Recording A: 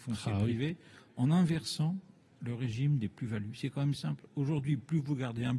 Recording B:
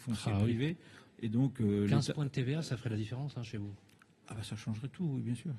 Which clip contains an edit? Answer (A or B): B